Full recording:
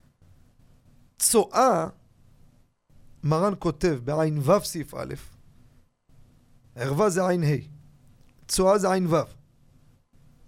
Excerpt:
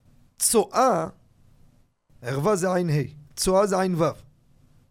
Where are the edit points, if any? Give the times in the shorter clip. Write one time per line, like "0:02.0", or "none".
0:02.2
0:03.3